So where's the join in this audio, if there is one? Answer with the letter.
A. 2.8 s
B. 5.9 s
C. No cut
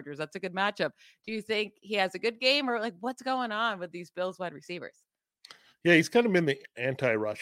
C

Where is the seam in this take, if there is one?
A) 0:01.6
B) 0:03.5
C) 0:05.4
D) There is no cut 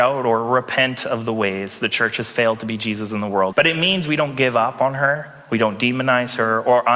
B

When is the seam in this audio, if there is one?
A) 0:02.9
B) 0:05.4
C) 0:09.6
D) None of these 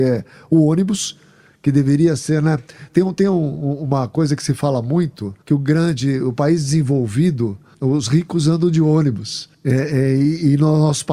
B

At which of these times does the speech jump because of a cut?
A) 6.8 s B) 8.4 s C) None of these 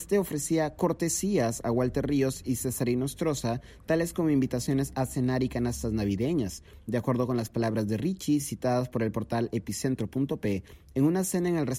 C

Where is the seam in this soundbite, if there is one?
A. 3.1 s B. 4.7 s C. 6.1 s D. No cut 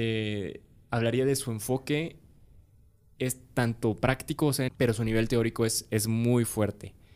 B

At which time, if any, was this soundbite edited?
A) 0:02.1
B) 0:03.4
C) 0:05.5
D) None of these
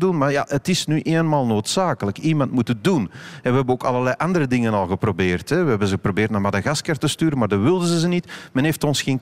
D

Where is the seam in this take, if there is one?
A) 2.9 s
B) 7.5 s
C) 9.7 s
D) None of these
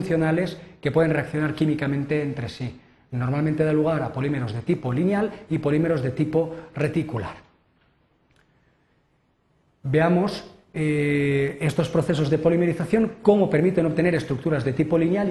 D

